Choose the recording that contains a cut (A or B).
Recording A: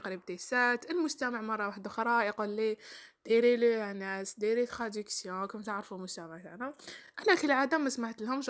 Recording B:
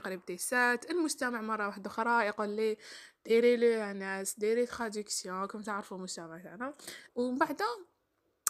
B